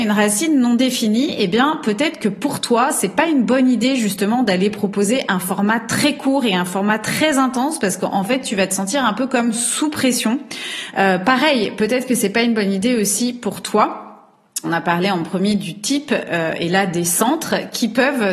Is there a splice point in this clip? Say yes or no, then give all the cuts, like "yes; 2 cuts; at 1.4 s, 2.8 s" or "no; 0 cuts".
yes; 1 cut; at 14.6 s